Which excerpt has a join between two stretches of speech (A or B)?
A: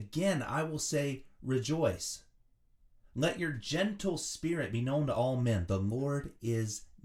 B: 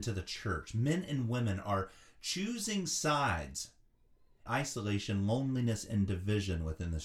B